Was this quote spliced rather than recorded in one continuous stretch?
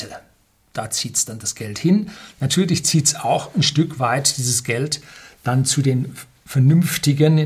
no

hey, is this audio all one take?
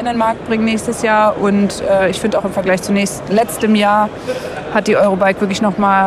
yes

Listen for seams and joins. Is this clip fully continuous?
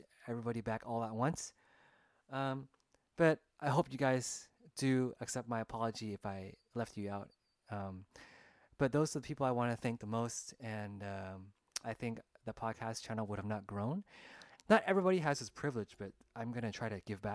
no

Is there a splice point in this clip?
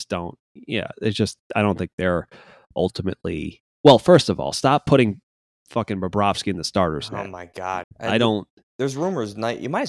yes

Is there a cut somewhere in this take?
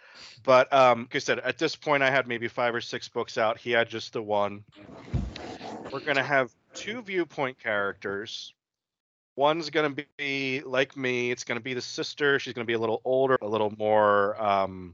yes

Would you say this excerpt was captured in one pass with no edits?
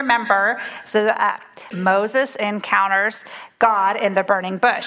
no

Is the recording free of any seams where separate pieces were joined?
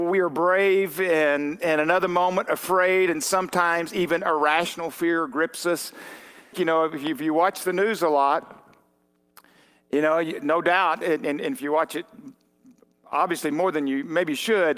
no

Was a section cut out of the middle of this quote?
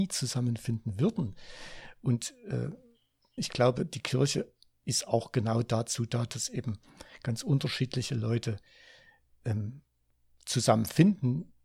yes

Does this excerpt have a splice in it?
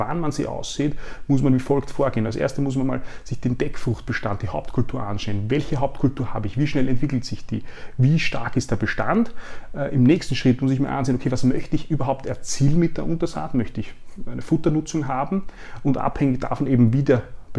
no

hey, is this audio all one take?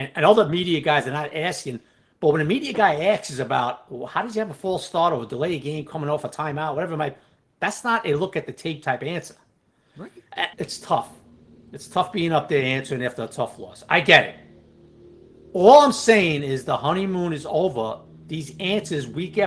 no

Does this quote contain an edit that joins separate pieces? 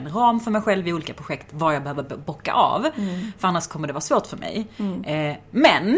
no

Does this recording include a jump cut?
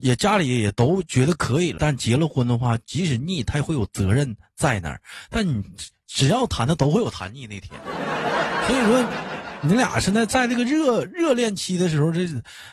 yes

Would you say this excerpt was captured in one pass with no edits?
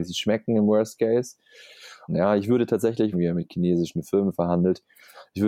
no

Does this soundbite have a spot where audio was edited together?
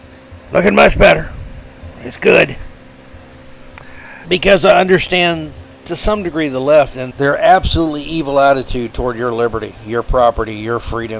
yes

